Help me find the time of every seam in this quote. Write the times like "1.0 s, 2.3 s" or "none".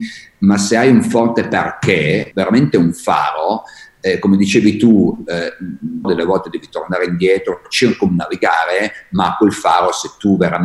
2.3 s, 6.0 s